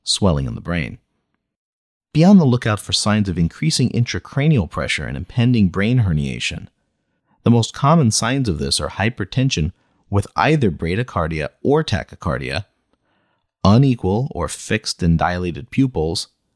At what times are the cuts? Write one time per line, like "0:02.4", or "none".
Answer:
none